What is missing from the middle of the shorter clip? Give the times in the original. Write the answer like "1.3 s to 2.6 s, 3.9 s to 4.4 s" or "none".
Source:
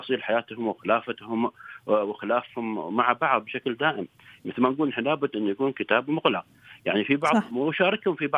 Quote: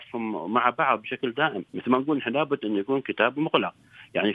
4.1 s to 4.4 s